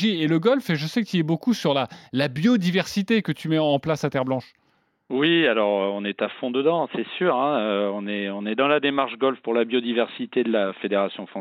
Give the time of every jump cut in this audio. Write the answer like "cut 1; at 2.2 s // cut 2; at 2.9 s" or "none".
none